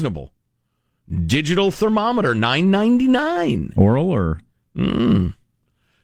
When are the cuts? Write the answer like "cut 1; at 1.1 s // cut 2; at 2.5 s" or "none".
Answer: none